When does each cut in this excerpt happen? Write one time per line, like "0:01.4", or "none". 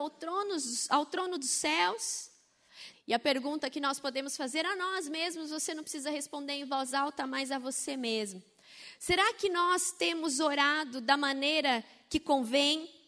0:02.9